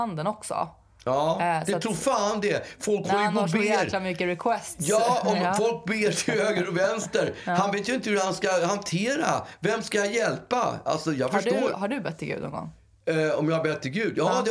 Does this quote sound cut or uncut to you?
uncut